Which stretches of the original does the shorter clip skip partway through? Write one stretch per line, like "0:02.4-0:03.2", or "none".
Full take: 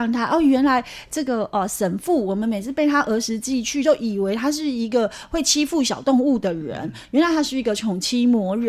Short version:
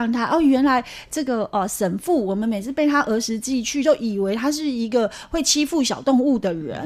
none